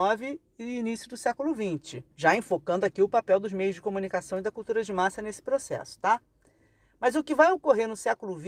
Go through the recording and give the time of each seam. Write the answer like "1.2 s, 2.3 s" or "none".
2.1 s